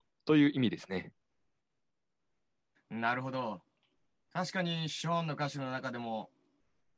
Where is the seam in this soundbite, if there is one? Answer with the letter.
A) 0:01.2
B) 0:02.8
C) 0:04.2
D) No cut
B